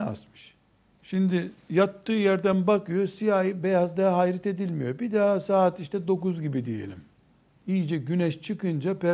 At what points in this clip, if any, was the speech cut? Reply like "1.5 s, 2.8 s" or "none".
0.9 s